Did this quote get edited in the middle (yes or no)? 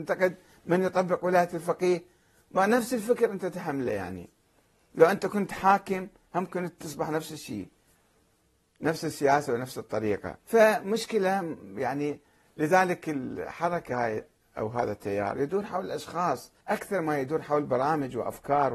yes